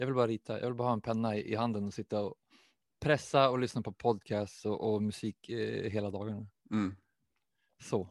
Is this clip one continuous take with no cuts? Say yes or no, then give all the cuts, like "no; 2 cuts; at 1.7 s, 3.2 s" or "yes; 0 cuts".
yes; 0 cuts